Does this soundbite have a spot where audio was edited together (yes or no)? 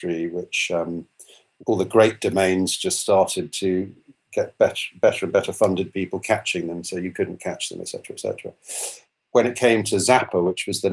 no